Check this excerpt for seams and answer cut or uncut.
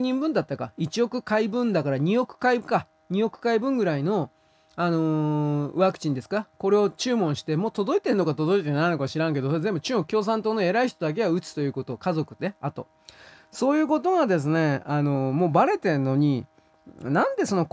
uncut